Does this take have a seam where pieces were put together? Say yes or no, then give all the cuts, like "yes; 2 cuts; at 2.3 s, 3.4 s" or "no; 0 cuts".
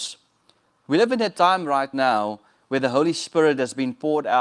no; 0 cuts